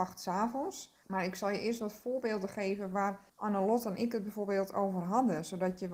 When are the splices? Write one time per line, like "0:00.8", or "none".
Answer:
0:01.0
0:03.3